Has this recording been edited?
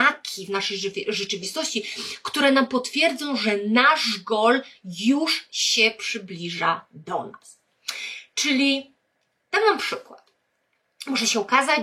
no; 0 cuts

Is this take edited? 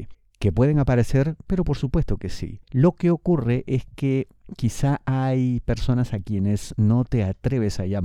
yes; 1 cut; at 2.6 s

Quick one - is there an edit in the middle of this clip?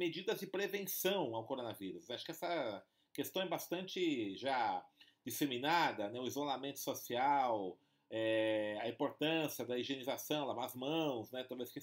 no; 0 cuts

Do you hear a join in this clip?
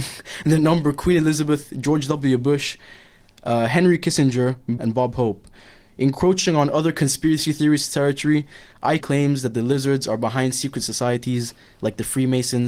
yes; 2 cuts; at 4.8 s, 9.0 s

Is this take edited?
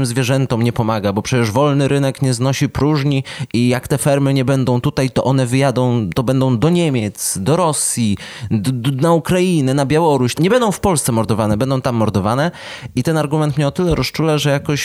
yes; 1 cut; at 10.4 s

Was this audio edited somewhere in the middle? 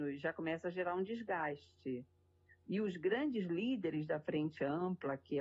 no; 0 cuts

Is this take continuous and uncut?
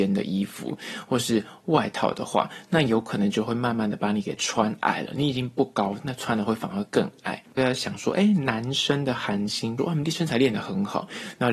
no; 2 cuts; at 7.6 s, 9.8 s

